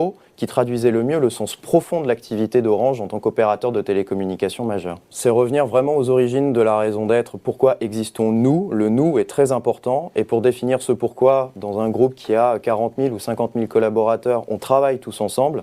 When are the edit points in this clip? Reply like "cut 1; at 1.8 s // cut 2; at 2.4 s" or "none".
cut 1; at 5.1 s